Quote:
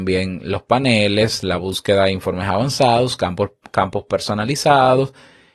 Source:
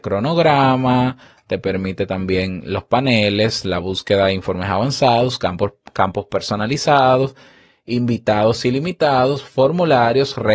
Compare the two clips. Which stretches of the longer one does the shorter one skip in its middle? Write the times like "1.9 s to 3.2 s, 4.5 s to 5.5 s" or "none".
none